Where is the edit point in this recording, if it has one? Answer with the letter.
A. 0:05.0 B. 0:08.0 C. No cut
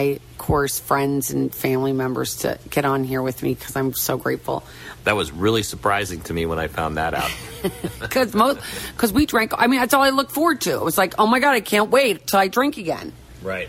A